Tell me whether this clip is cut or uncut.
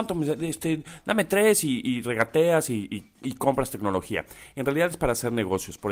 uncut